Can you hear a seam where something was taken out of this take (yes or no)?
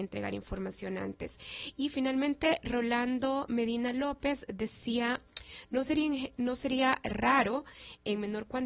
no